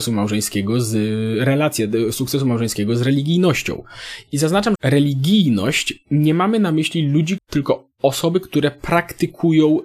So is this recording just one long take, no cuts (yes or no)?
no